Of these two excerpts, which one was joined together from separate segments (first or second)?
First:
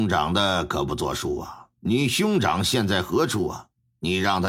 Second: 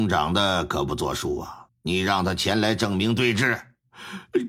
second